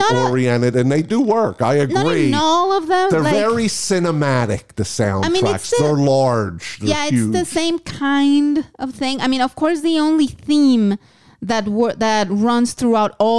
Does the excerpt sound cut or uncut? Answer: uncut